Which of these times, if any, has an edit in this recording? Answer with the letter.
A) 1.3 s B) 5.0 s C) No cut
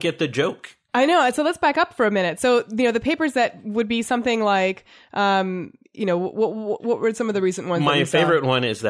C